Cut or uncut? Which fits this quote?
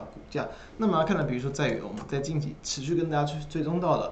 uncut